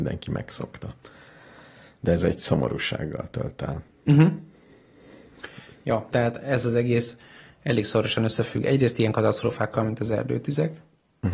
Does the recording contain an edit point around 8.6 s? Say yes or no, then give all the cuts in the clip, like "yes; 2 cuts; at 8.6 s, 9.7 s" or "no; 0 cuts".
no; 1 cut; at 6.1 s